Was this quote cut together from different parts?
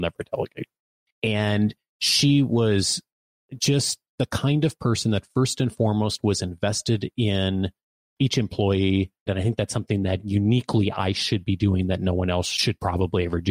yes; 2 cuts; at 1.0 s, 9.3 s

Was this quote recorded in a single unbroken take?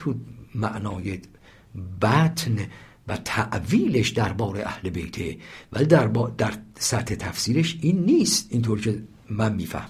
yes; 0 cuts

